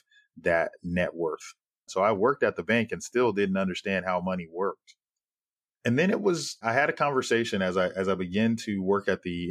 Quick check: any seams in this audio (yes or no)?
yes